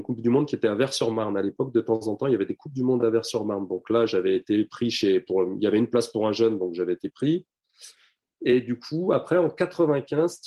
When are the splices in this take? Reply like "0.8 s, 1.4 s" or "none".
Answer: none